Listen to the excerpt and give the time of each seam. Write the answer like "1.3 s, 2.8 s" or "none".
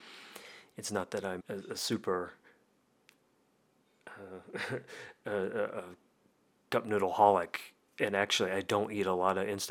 1.4 s